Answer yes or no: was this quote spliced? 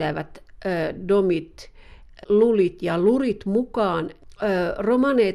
yes